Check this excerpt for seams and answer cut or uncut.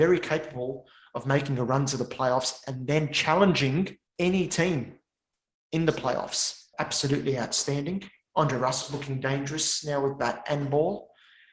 cut